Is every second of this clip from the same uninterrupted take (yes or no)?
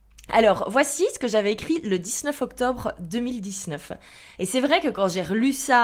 no